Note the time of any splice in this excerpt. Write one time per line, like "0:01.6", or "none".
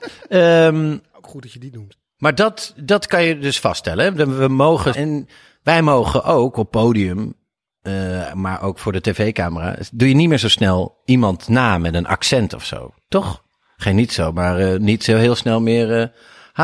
0:04.9